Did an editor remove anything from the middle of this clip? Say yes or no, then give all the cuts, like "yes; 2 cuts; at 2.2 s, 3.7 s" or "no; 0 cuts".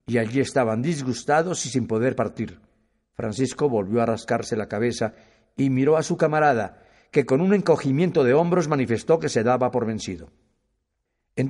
no; 0 cuts